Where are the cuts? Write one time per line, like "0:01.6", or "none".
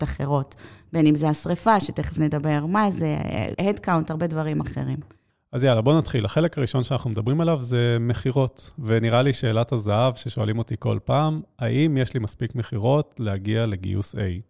0:03.5